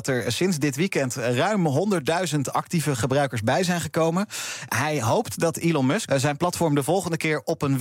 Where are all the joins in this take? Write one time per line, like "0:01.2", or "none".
0:04.7
0:06.1